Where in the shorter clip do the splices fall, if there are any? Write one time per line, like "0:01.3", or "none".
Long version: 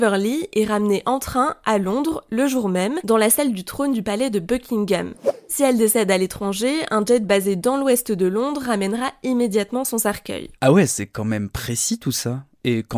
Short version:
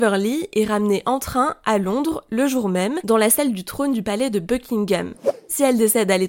none